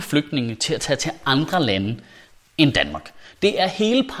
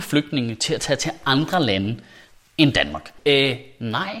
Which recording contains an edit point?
second; 1 cut; at 3.2 s

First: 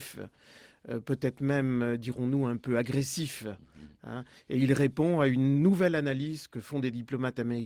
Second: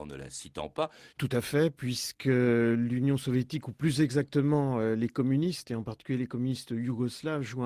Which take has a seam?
second; 1 cut; at 1.1 s

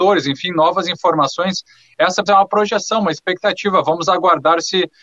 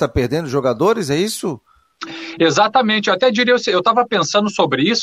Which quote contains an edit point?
first; 1 cut; at 2.3 s

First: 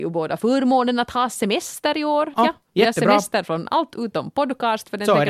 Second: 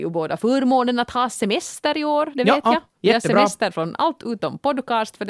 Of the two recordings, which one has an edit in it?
first; 1 cut; at 2.3 s

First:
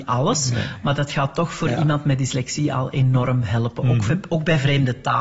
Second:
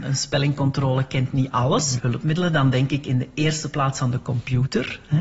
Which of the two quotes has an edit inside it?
second; 1 cut; at 2.0 s

